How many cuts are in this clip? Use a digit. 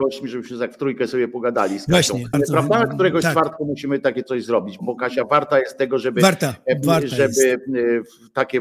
2